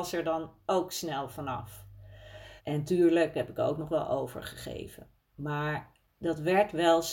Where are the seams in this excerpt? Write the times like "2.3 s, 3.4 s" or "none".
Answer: 2.6 s